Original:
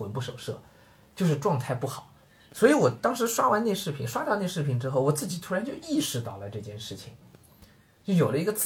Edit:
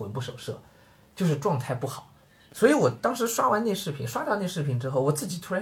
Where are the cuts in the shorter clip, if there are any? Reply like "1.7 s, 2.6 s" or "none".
none